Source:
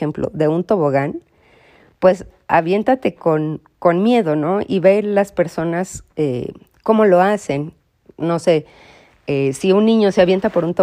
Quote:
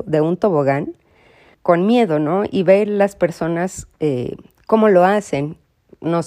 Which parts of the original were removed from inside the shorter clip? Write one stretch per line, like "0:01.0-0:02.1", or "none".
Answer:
0:01.8-0:03.7